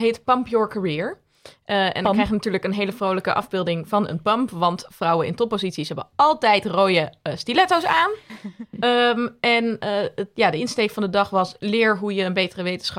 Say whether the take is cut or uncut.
uncut